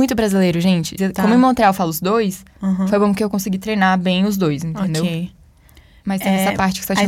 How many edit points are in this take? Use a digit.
1